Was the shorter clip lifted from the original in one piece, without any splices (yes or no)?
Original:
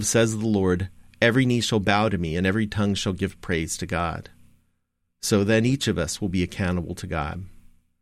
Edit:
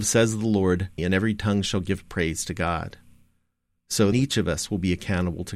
no